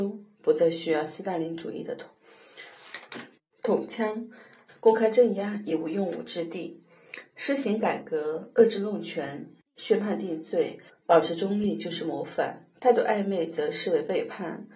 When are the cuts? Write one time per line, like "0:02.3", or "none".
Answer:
0:04.7
0:10.9